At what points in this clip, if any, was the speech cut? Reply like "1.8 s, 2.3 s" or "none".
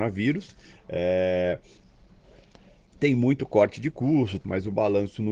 4.4 s